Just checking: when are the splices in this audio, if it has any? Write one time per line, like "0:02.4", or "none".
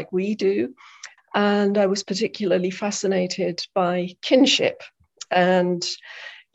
0:01.2